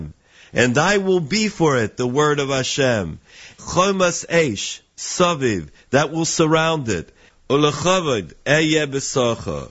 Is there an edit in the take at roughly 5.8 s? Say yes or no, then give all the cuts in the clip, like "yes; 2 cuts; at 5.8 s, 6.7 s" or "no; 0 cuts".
no; 1 cut; at 3.6 s